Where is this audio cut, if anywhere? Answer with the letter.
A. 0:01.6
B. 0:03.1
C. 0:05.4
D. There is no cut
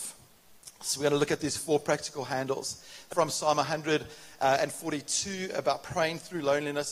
B